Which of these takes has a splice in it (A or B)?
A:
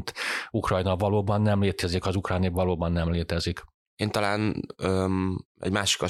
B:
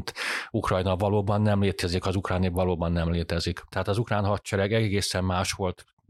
B